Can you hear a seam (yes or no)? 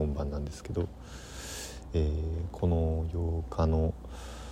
no